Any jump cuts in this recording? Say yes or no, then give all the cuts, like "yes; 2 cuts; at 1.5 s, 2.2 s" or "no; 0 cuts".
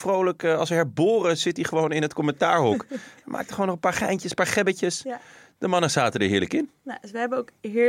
no; 0 cuts